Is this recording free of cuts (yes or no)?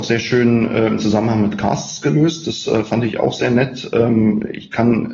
yes